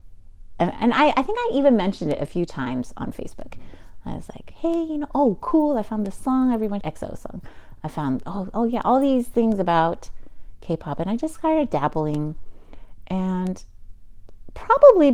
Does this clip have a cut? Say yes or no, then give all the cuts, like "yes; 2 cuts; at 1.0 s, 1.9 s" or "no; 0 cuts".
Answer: yes; 1 cut; at 6.8 s